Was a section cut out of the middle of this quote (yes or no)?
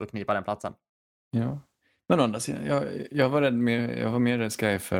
no